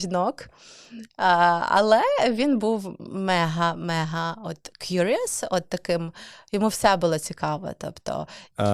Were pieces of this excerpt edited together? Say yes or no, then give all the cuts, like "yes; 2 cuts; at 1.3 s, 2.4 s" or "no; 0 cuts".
no; 0 cuts